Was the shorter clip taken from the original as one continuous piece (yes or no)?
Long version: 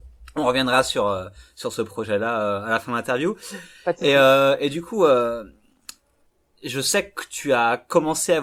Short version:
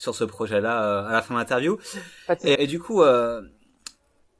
no